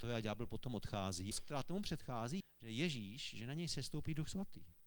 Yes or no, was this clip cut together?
yes